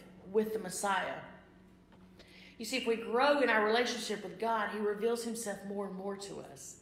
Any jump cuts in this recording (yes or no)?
no